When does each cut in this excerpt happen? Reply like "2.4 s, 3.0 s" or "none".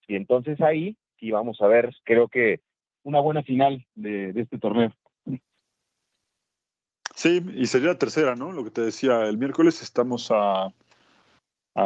2.0 s